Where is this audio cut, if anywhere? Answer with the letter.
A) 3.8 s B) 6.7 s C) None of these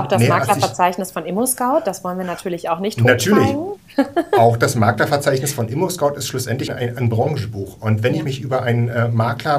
B